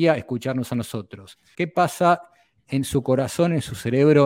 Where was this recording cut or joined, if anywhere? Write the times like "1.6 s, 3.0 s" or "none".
1.5 s